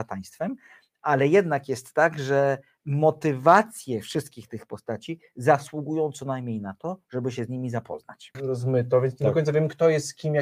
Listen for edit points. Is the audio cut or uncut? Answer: cut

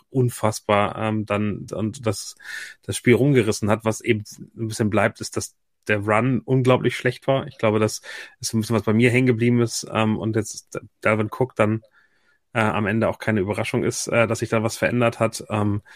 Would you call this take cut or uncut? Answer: cut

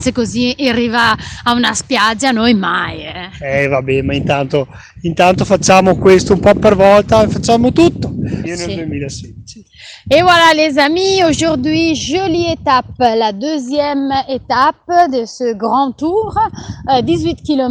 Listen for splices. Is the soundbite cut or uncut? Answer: cut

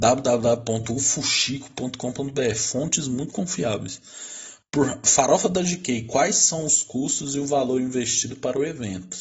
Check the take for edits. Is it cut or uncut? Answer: uncut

